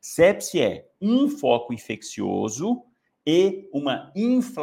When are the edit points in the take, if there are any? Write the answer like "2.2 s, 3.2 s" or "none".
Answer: none

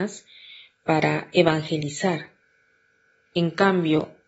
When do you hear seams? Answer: 3.3 s

